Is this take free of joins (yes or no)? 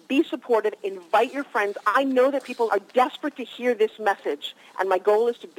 no